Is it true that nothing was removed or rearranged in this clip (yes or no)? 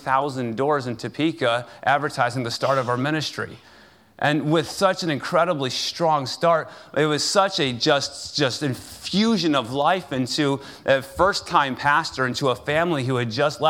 yes